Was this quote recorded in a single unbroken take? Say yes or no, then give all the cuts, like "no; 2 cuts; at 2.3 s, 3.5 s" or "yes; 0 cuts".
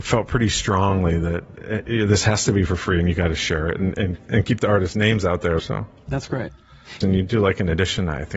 no; 2 cuts; at 5.6 s, 7.0 s